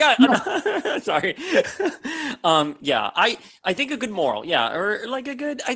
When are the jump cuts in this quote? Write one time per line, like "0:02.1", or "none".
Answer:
none

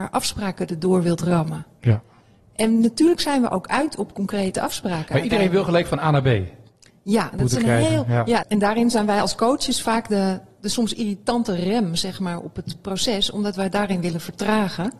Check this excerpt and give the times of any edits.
0:07.3
0:08.4

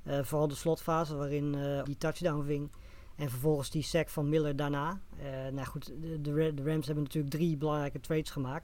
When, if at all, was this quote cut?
0:01.8

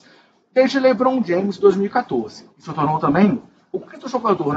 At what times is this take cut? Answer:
0:02.5

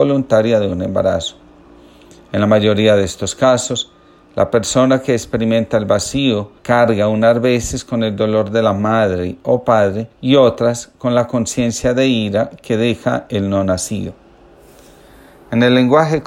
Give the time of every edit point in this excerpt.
0:06.6
0:10.1

